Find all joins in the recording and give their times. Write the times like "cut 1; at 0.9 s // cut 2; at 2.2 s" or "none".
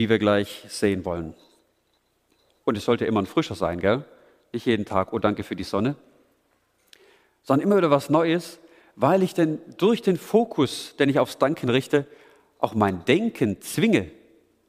cut 1; at 2.6 s